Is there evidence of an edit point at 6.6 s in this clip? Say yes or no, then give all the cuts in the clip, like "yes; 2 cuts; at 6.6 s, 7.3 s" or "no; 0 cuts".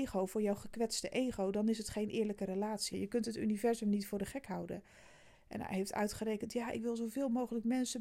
no; 2 cuts; at 2.9 s, 5.3 s